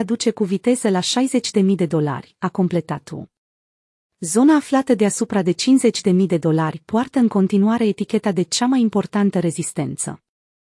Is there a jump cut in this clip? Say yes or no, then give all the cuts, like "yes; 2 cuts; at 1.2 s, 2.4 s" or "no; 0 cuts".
no; 0 cuts